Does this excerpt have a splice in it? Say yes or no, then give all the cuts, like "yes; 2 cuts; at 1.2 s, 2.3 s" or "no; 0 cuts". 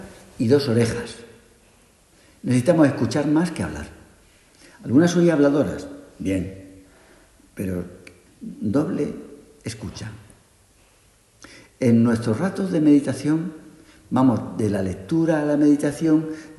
no; 0 cuts